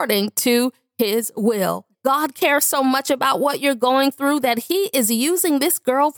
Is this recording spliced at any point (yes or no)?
yes